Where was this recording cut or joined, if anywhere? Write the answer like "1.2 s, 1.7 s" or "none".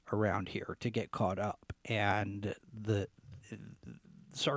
none